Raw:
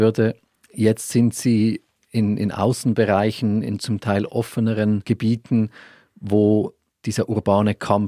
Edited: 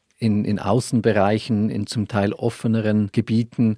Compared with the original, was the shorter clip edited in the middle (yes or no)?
no